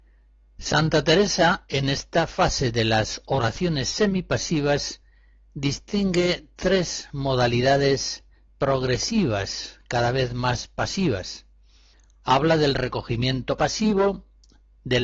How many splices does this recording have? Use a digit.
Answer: 0